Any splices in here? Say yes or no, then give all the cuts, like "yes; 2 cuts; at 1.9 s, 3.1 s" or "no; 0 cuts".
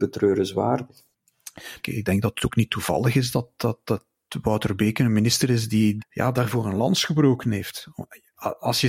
yes; 2 cuts; at 1.8 s, 6.0 s